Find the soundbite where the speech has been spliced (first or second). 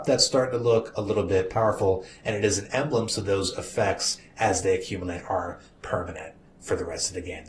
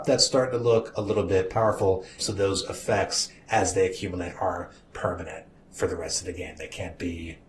second